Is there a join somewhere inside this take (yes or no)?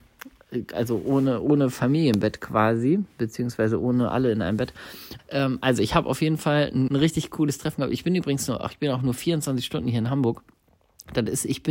yes